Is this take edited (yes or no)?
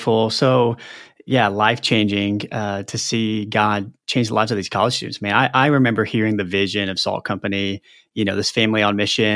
no